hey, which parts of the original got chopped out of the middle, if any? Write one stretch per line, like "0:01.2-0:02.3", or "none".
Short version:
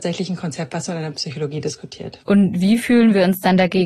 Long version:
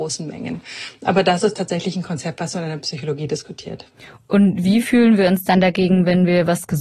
0:03.9-0:04.3